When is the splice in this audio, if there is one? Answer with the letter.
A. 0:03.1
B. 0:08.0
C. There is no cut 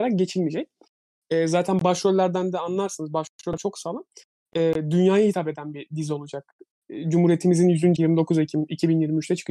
B